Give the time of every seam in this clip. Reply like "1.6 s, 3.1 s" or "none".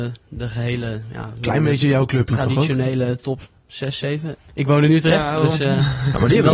4.4 s